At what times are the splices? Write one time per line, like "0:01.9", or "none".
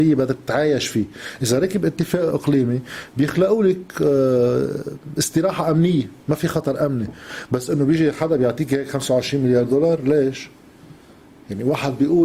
0:02.3
0:06.2